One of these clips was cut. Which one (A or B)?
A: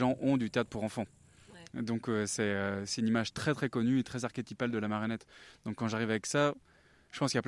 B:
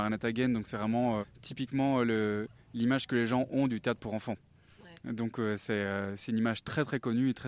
B